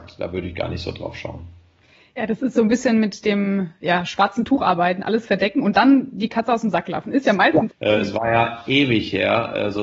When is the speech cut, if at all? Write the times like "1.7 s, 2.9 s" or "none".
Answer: 7.7 s